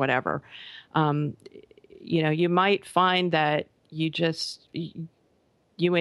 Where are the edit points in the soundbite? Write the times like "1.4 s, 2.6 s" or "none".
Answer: 4.7 s

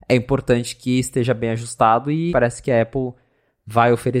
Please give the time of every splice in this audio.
2.3 s

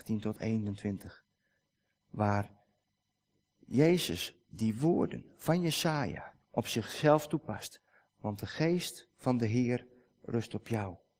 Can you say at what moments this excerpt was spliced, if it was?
6.4 s, 8.1 s

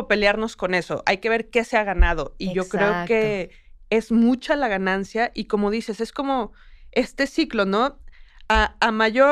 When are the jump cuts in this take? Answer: none

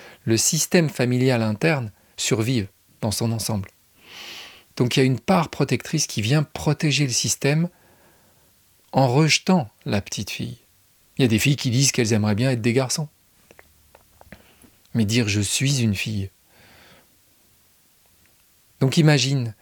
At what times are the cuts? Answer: 11.0 s, 14.7 s

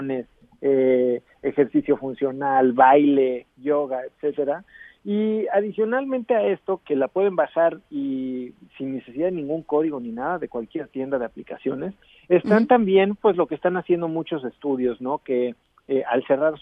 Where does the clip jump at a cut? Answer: 6.8 s

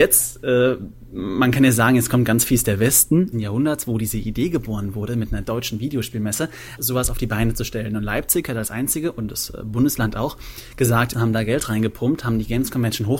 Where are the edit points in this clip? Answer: 3.3 s, 6.8 s, 11.1 s

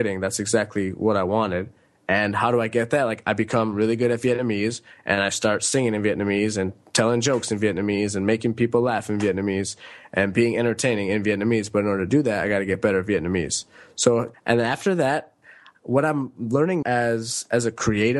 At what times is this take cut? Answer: 14.3 s, 16.8 s

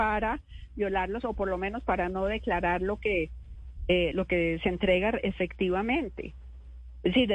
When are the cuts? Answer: 4.1 s

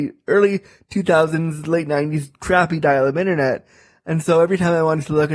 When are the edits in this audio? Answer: none

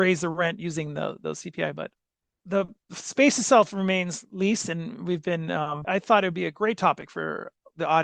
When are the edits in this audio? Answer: 5.8 s

